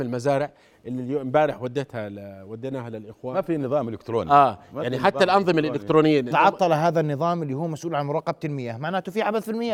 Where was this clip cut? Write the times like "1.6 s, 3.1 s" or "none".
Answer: 6.3 s